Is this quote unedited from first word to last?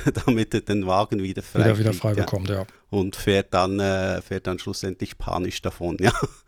yes; 0 cuts

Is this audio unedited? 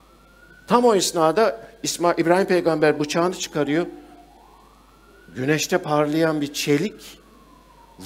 yes; 0 cuts

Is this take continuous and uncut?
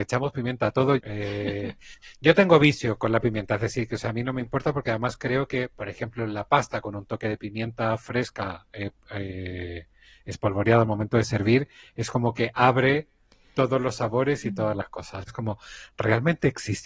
no; 2 cuts; at 1.0 s, 15.3 s

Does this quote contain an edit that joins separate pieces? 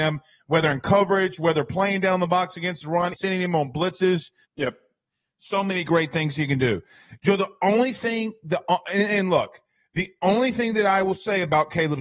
yes; 2 cuts; at 3.1 s, 4.4 s

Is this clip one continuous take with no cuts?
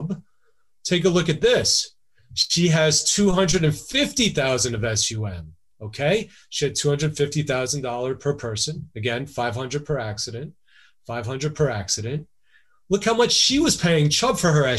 yes; 0 cuts

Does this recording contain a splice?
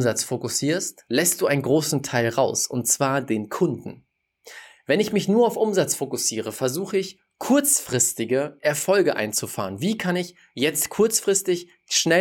no; 0 cuts

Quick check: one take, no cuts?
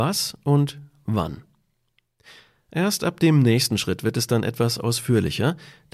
yes; 0 cuts

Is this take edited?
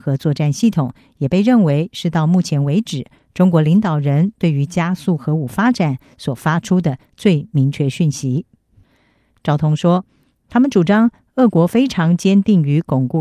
yes; 1 cut; at 9.3 s

